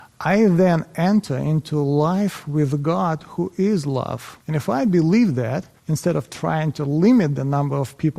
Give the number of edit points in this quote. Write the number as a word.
two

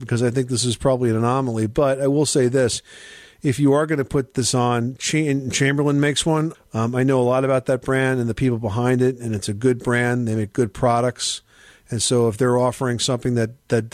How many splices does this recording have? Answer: one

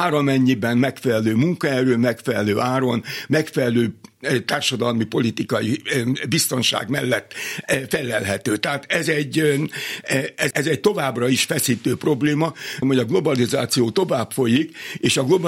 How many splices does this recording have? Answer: two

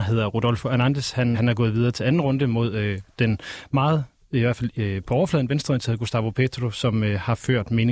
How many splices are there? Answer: one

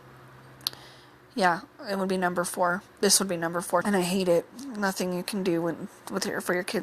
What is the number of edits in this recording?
one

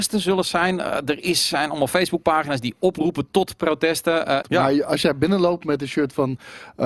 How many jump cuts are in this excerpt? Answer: one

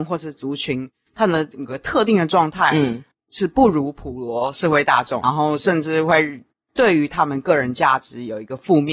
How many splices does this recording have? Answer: one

